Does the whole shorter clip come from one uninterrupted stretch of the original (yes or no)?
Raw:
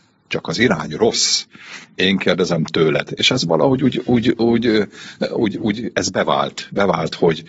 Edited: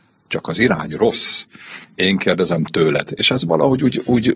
yes